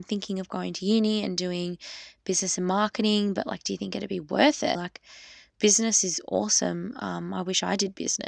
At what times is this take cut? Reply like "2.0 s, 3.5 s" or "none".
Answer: 4.7 s